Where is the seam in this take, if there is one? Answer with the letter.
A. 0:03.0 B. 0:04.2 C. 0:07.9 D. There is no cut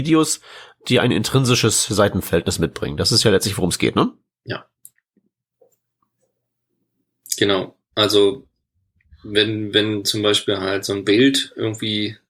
D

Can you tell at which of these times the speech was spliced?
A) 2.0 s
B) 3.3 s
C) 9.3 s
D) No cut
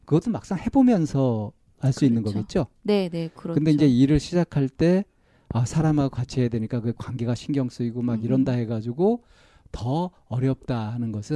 D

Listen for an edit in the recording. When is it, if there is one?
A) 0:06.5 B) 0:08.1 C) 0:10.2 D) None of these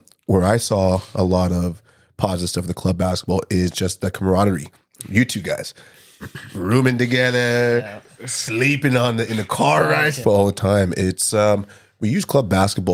C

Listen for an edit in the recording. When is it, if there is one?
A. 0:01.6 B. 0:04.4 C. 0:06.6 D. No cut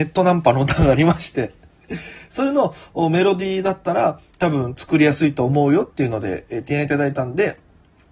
D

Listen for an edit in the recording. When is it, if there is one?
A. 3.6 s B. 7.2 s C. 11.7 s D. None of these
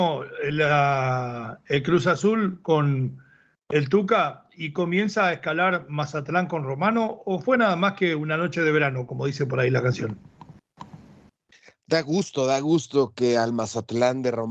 D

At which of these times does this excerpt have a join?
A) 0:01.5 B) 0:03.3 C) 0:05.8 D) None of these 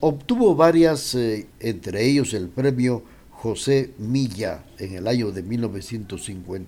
A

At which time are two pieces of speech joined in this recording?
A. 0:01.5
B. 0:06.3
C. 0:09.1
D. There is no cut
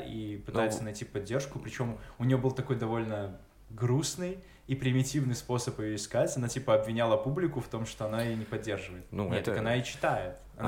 C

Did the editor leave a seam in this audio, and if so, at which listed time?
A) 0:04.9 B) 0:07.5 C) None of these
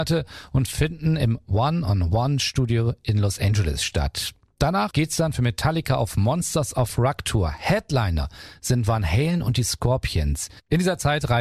A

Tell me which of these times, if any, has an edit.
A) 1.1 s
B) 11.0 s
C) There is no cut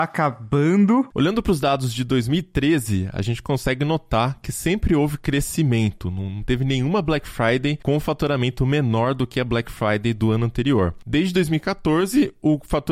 A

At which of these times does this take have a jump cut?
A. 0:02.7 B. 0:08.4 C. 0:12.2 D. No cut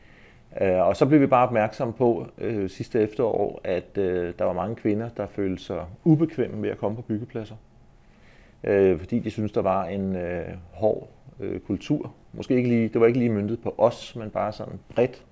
D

